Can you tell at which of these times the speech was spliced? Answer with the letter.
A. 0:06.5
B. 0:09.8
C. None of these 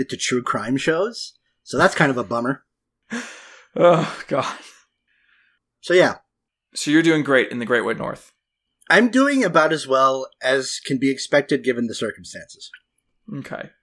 C